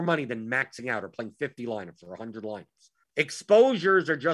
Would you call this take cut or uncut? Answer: cut